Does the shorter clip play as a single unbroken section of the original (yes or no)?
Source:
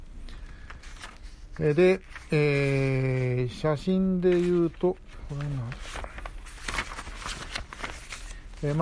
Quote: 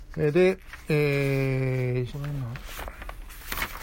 no